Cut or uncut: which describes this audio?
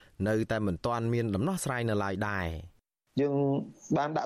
uncut